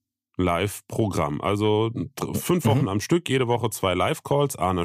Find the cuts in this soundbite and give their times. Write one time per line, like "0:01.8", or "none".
none